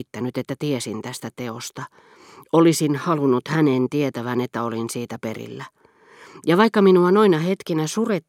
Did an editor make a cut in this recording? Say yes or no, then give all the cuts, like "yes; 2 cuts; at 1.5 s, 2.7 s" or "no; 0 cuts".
no; 0 cuts